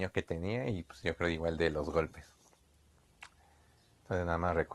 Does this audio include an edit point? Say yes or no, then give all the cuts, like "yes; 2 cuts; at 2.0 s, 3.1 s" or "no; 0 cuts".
no; 0 cuts